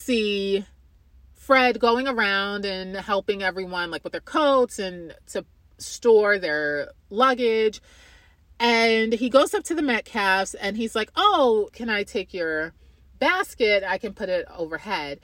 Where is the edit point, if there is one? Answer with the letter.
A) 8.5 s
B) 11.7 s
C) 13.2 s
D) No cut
B